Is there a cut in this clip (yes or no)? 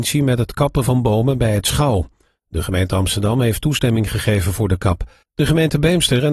yes